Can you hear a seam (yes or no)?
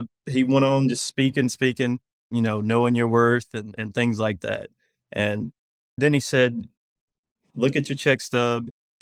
yes